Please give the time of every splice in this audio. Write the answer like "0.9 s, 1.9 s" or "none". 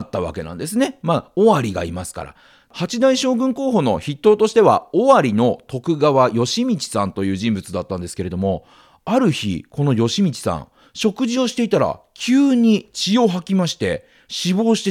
none